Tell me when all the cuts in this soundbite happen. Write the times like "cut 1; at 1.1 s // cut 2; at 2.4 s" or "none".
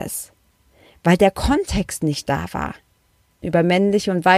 cut 1; at 3.4 s